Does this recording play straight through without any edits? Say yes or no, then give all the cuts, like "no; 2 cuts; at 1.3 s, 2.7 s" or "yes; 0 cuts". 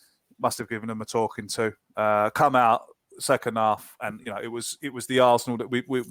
yes; 0 cuts